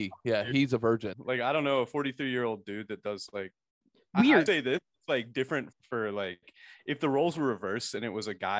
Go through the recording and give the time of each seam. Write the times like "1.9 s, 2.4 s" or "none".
1.1 s, 4.5 s, 5.7 s

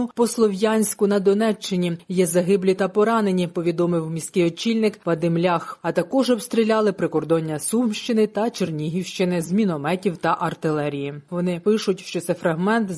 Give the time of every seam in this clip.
5.8 s, 11.3 s

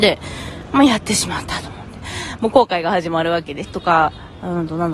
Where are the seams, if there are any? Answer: 2.4 s, 3.6 s

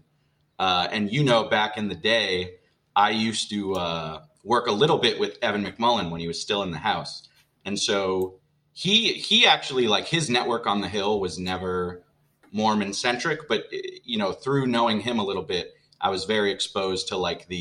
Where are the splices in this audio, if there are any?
none

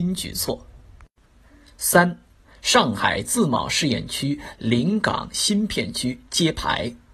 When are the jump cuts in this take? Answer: none

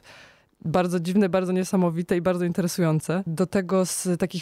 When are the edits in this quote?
3.3 s

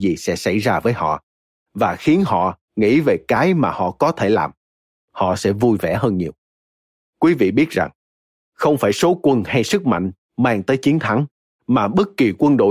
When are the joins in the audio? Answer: none

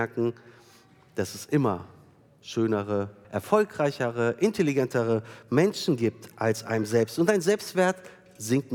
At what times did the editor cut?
3.2 s

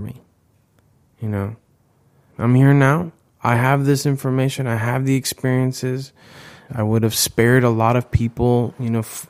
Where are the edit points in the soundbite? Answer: 2.3 s, 6.7 s

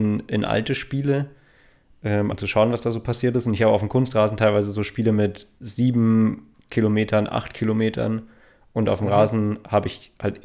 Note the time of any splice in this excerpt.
2.3 s

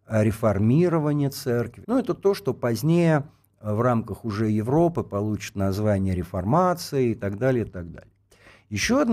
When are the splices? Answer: 1.8 s, 7.7 s

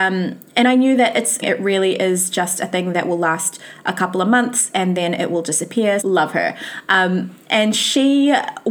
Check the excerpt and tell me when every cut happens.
1.4 s, 6.0 s

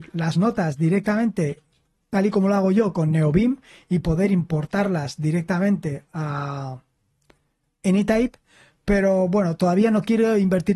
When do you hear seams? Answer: none

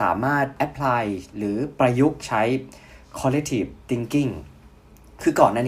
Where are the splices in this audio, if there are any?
none

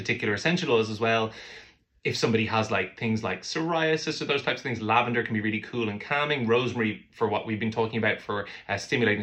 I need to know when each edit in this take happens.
none

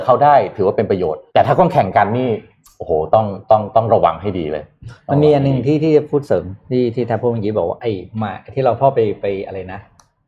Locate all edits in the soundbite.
1.3 s

